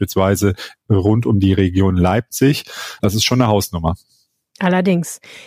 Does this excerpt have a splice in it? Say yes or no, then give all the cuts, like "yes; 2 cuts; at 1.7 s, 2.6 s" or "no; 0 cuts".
yes; 1 cut; at 3.0 s